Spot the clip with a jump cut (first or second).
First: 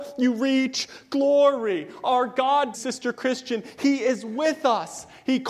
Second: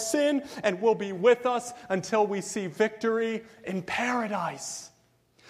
first